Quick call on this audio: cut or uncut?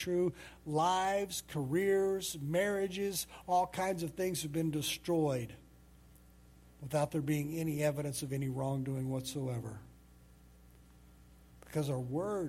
uncut